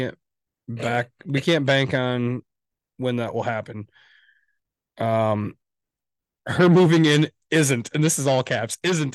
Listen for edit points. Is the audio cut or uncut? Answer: uncut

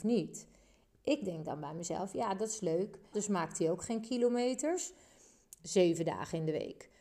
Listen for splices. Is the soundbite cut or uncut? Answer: cut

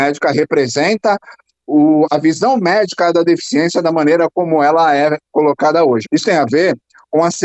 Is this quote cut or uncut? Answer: cut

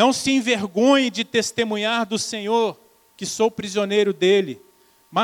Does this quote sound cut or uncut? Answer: cut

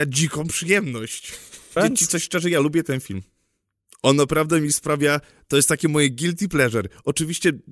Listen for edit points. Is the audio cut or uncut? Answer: cut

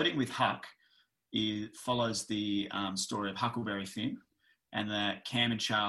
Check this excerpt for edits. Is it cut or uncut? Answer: uncut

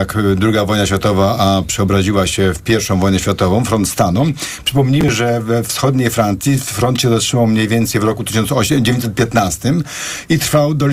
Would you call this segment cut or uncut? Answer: uncut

